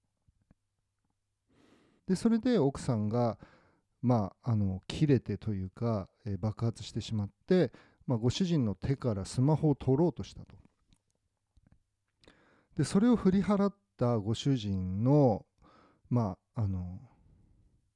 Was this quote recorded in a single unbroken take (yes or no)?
no